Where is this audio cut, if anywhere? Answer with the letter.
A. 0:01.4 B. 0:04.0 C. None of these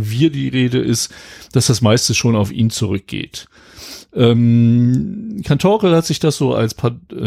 C